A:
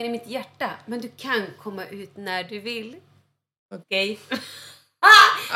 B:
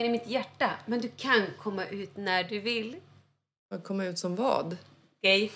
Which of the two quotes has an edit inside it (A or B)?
A